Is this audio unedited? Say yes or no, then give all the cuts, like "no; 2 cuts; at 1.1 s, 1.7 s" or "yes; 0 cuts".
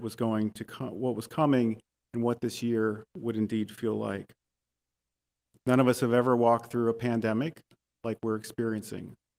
yes; 0 cuts